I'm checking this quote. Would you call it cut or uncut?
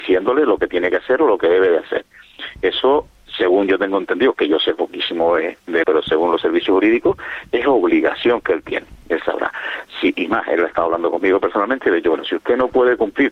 cut